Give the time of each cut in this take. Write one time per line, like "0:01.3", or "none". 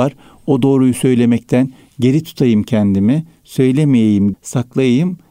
0:04.3